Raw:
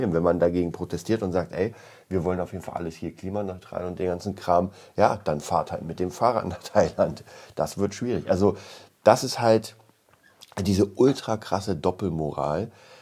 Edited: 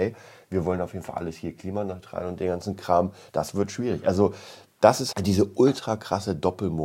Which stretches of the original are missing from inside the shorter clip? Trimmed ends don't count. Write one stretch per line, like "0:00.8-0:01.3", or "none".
0:04.9-0:07.5
0:09.4-0:10.5